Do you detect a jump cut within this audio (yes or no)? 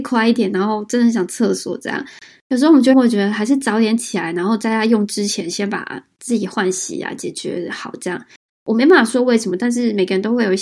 yes